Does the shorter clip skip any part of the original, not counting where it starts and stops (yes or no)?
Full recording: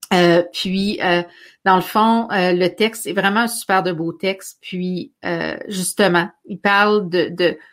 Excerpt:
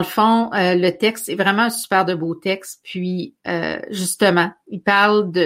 no